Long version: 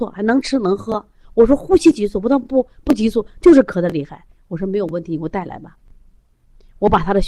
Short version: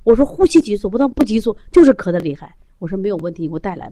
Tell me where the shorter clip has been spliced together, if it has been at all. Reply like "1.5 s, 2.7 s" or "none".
1.1 s

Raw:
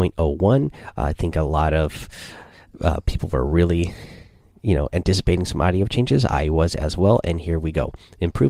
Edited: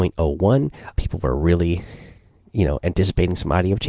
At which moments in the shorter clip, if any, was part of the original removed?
0.9 s

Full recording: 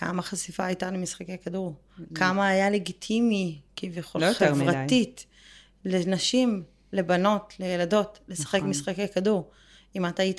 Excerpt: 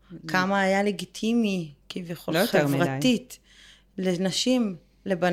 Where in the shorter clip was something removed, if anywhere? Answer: none

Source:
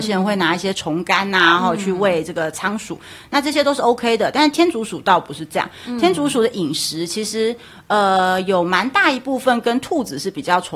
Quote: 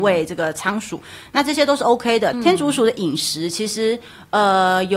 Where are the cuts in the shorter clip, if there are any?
2.3 s

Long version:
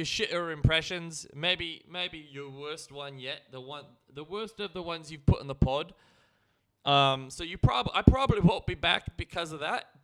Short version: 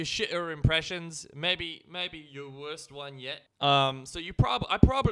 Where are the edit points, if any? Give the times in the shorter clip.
3.5 s

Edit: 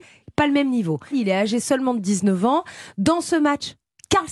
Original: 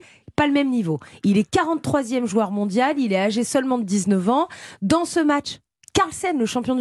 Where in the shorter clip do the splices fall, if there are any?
1.1 s

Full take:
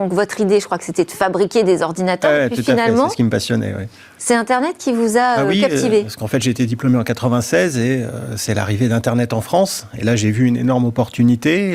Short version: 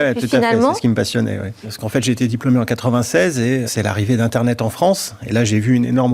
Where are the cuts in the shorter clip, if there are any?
1.6 s, 3.7 s

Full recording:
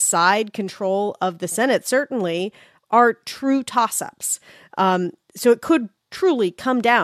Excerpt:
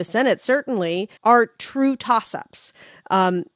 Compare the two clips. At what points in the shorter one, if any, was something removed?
1.2 s

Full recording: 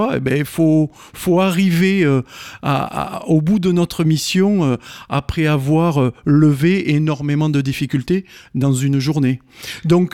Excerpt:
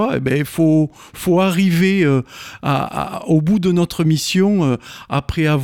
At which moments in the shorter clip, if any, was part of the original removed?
none

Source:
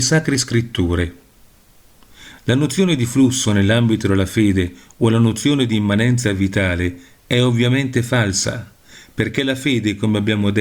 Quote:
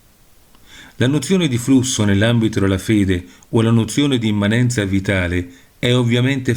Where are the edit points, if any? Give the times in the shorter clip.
none

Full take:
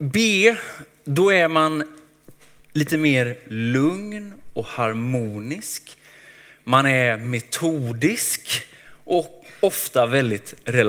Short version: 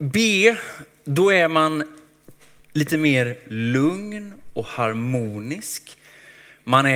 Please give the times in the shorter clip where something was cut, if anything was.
none

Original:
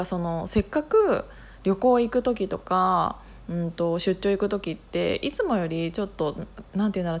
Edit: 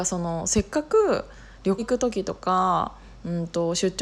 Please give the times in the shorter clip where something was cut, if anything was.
1.8 s

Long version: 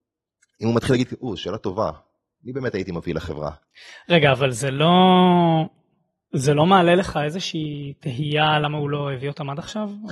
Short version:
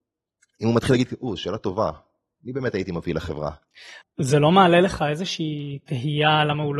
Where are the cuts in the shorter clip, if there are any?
4.0 s

